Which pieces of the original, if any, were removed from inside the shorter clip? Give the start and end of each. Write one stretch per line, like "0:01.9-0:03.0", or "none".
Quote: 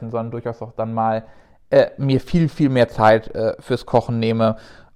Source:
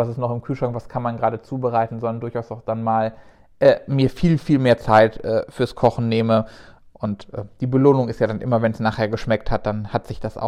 none